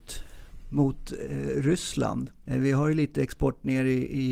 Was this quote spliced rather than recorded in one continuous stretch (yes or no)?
yes